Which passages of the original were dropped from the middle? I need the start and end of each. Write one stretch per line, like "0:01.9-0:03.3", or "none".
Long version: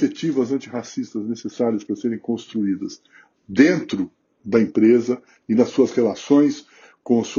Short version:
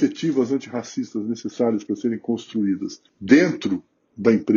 0:03.1-0:03.4